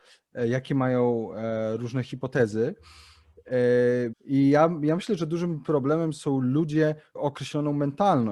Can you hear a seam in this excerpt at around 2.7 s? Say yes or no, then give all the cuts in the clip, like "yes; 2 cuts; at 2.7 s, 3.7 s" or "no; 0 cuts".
no; 2 cuts; at 4.1 s, 7.1 s